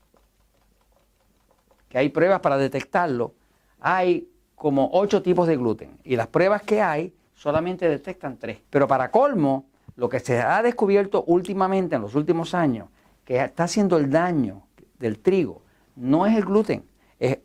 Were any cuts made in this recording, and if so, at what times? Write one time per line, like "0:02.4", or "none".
0:08.6